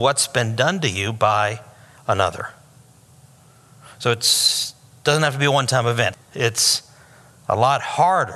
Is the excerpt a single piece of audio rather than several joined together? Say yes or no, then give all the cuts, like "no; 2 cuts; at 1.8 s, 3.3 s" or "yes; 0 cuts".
no; 1 cut; at 6.1 s